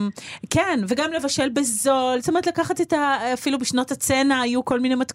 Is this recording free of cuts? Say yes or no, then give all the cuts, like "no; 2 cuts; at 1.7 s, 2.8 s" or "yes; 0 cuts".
yes; 0 cuts